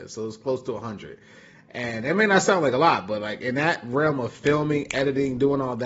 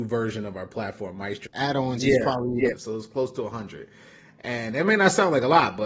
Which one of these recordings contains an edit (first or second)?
second